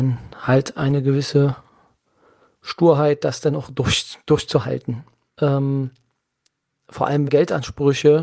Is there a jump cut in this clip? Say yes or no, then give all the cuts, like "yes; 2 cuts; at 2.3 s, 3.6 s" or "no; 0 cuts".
yes; 2 cuts; at 5.3 s, 7.3 s